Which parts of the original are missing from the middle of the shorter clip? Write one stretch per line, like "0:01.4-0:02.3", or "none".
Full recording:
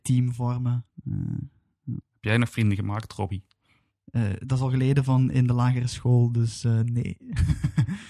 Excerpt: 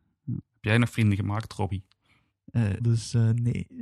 0:04.4-0:06.3